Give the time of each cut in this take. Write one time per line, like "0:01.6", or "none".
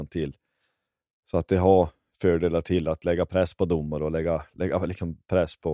none